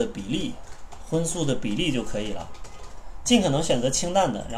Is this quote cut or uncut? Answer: uncut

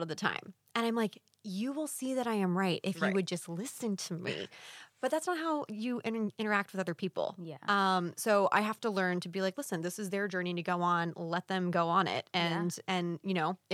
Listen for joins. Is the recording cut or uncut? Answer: uncut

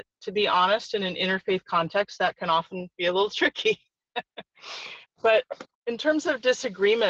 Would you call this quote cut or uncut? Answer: uncut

